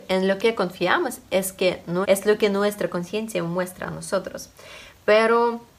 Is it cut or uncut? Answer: cut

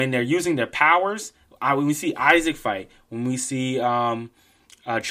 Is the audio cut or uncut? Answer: uncut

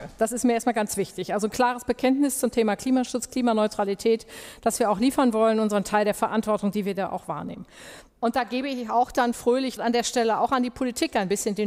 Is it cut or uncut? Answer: cut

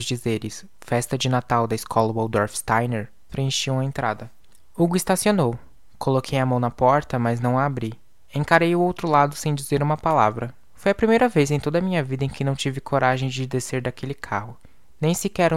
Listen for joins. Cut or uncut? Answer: cut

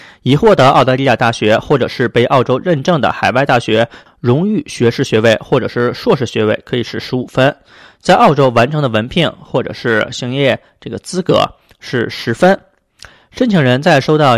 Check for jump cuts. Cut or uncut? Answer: uncut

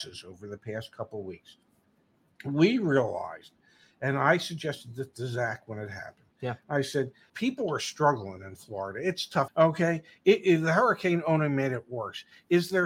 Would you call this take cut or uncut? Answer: cut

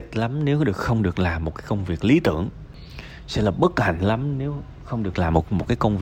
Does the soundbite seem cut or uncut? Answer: uncut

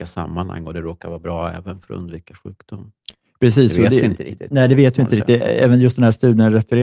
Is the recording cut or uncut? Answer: uncut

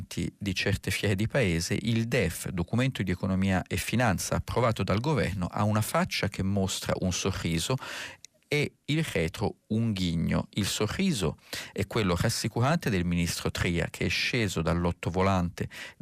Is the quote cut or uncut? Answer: uncut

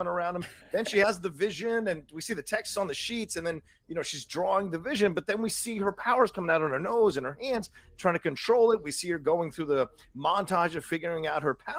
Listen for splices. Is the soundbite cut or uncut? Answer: uncut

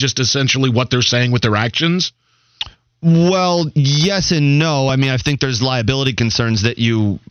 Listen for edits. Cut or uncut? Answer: uncut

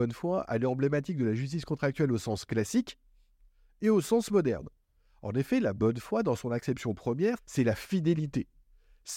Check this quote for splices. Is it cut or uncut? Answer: cut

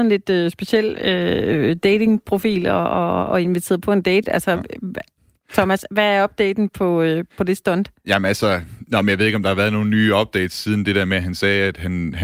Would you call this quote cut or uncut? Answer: uncut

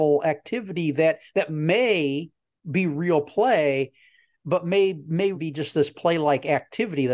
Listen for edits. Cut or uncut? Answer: cut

